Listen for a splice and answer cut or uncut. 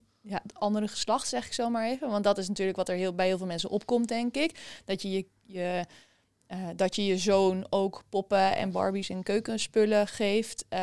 uncut